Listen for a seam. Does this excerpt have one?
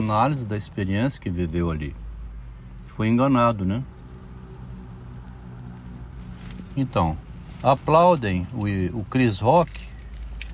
no; 0 cuts

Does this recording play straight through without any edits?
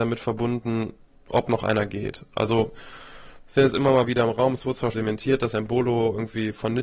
no; 1 cut; at 4.9 s

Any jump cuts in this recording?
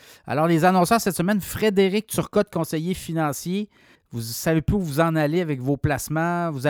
yes; 1 cut; at 4.0 s

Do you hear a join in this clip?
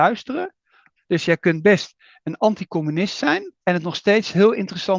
yes; 2 cuts; at 1.0 s, 3.6 s

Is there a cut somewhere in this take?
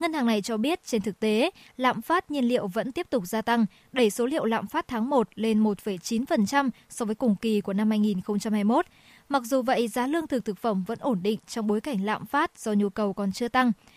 no; 0 cuts

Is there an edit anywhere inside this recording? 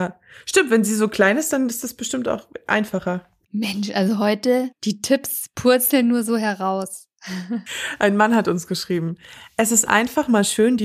no; 0 cuts

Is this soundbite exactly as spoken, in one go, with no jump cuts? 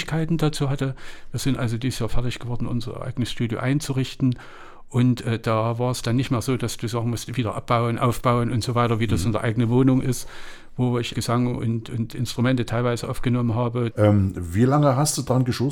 no; 2 cuts; at 11.1 s, 13.9 s

